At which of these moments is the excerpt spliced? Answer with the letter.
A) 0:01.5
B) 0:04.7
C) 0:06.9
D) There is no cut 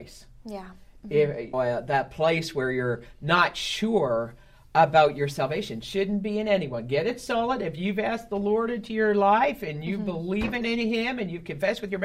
A